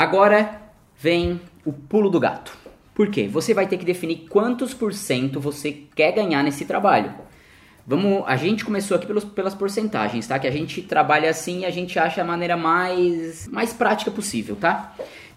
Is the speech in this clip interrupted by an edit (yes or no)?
no